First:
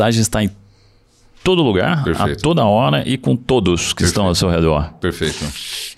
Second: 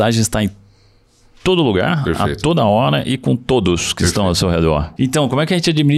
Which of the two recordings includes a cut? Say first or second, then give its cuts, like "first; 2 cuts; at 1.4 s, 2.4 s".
second; 1 cut; at 5.0 s